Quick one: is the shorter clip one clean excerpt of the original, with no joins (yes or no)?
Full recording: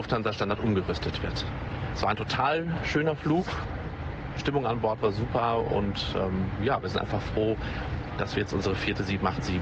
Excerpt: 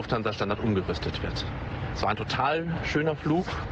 yes